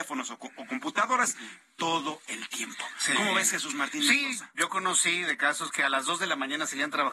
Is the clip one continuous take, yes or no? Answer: yes